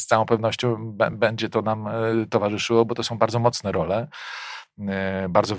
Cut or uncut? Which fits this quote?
uncut